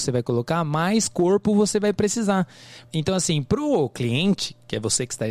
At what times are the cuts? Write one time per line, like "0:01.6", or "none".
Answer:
0:02.9